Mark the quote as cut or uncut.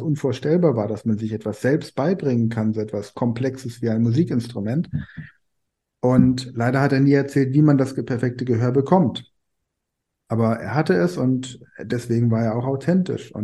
uncut